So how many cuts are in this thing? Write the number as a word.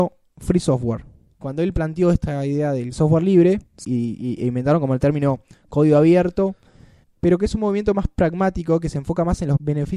two